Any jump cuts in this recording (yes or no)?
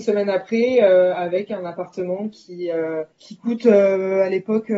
yes